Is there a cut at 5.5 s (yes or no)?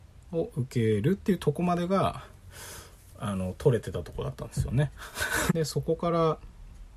yes